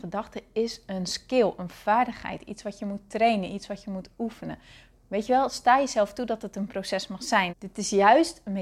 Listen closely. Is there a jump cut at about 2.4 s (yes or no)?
no